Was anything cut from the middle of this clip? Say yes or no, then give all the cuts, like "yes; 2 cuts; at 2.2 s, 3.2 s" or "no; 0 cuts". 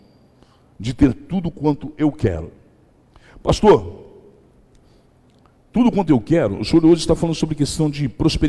no; 0 cuts